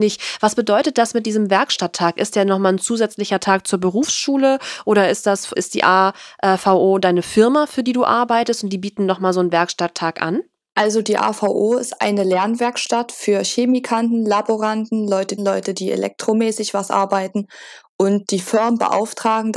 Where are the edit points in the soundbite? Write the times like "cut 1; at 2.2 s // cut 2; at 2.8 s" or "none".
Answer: cut 1; at 5.5 s // cut 2; at 15.4 s